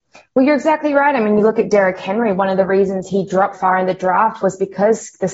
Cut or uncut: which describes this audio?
cut